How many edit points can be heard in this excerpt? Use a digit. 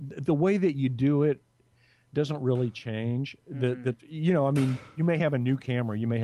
0